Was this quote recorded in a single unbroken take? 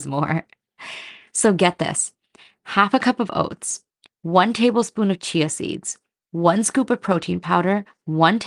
yes; 0 cuts

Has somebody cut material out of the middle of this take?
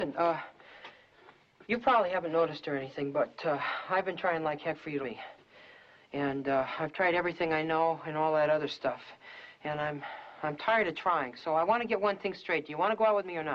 yes; 1 cut; at 5.0 s

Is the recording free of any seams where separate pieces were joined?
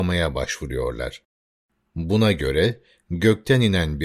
yes; 0 cuts

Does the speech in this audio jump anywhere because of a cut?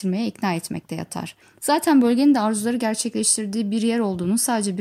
no; 0 cuts

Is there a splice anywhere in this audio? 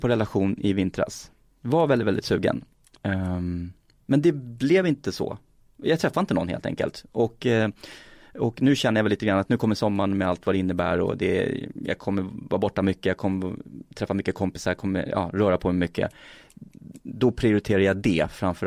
no; 0 cuts

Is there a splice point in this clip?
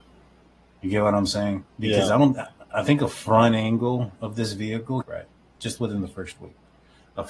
yes; 2 cuts; at 1.7 s, 5.0 s

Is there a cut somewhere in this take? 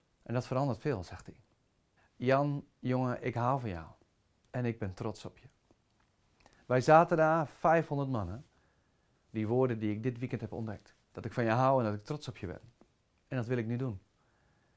yes; 3 cuts; at 2.0 s, 9.1 s, 11.0 s

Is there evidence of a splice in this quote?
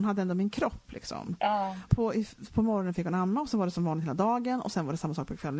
yes; 1 cut; at 1.9 s

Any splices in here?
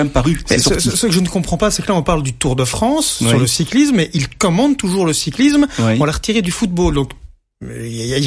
no; 0 cuts

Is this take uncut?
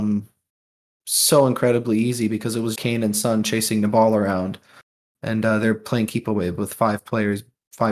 no; 1 cut; at 2.8 s

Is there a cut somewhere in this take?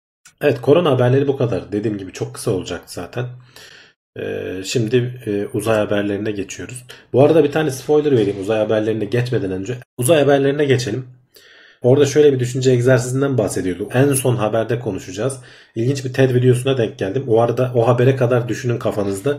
yes; 3 cuts; at 9.8 s, 11.8 s, 13.9 s

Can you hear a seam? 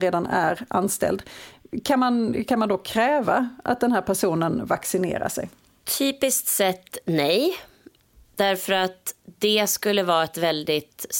yes; 1 cut; at 9.2 s

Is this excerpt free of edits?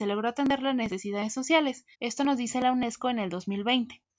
no; 1 cut; at 1.9 s

